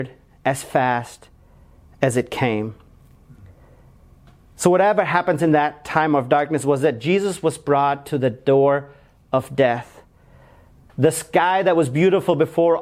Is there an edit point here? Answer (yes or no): yes